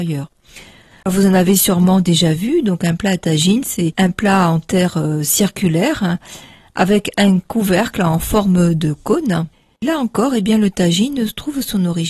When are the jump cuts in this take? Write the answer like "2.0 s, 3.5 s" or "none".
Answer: none